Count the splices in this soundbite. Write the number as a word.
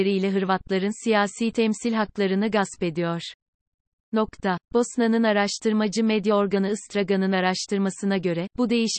one